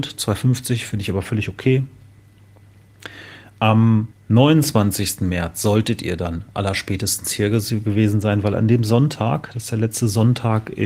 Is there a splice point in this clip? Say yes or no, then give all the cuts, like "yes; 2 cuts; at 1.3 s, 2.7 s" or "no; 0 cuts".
yes; 1 cut; at 4.1 s